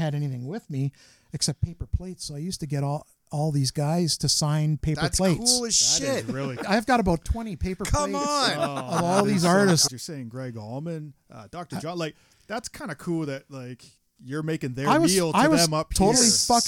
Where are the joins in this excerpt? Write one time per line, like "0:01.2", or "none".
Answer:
0:06.6
0:09.9